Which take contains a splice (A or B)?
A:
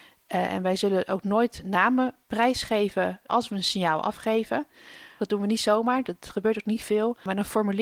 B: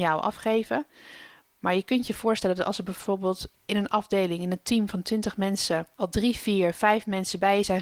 A